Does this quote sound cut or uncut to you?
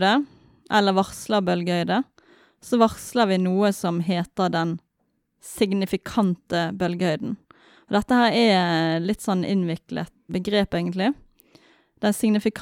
cut